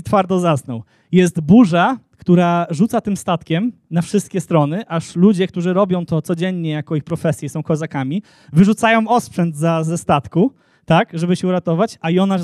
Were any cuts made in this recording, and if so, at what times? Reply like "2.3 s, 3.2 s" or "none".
none

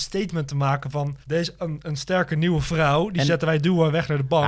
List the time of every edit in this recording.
1.2 s

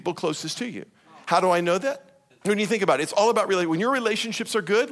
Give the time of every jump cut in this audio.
2.3 s

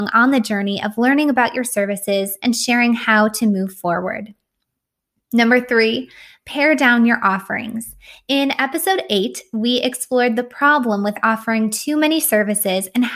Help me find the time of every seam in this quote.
2.4 s

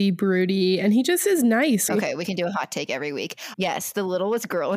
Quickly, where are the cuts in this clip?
1.9 s, 3.5 s

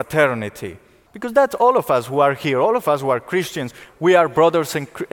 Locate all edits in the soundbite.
1.1 s, 3.9 s

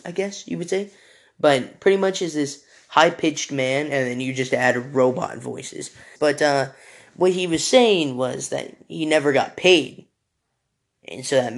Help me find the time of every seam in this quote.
6.2 s

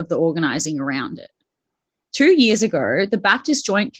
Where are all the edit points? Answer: 2.0 s

